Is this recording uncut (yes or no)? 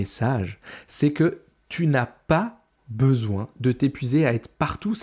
yes